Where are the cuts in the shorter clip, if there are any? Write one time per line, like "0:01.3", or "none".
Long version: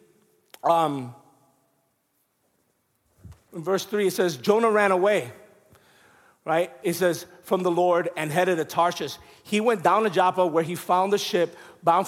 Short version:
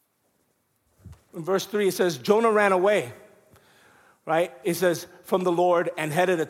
none